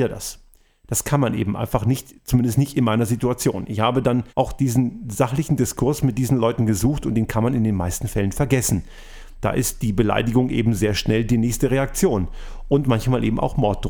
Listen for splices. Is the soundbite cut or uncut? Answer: cut